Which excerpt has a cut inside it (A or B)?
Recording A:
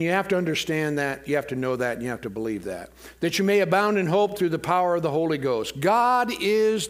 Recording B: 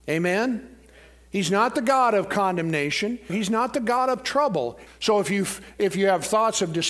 B